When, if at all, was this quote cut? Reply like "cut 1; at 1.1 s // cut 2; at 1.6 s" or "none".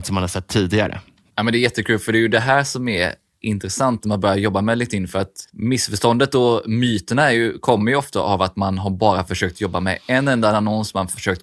none